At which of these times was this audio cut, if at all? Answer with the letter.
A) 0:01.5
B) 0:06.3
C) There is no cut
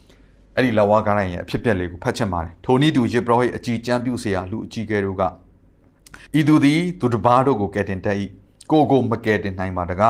B